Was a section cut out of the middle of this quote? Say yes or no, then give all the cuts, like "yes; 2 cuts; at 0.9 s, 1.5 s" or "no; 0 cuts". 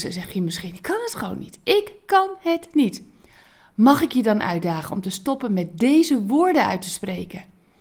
no; 0 cuts